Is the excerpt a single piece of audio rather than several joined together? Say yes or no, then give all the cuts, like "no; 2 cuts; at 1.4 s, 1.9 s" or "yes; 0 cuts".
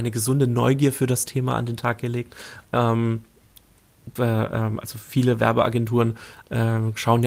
no; 2 cuts; at 2.6 s, 4.2 s